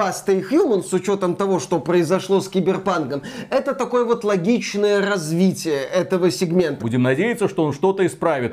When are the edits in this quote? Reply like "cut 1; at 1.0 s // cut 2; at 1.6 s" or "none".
cut 1; at 6.8 s